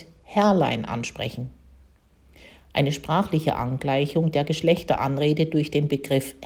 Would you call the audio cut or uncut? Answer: uncut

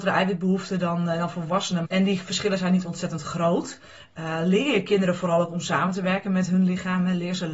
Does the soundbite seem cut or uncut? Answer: cut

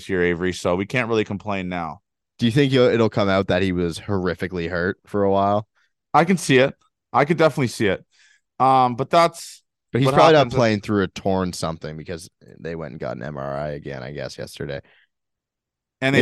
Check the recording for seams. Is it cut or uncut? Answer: cut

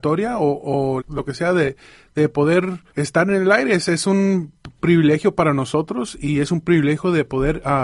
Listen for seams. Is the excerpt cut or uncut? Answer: cut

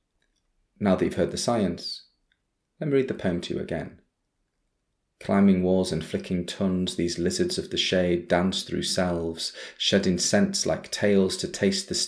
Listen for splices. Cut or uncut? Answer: uncut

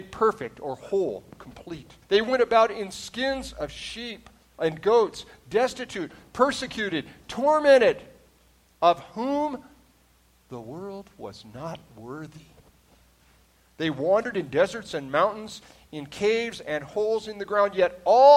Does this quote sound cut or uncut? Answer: cut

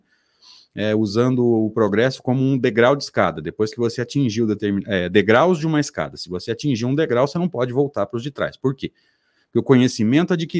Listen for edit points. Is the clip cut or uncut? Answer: uncut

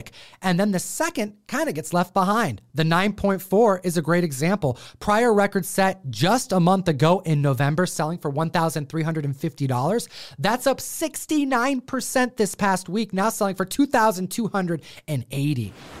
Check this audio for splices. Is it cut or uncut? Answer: uncut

